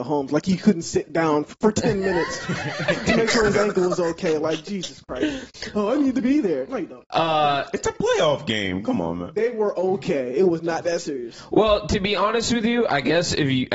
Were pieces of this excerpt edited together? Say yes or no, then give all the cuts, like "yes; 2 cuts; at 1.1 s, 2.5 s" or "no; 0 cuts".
yes; 1 cut; at 1.5 s